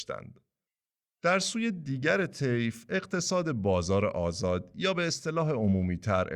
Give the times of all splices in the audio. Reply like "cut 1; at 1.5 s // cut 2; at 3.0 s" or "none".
cut 1; at 1.1 s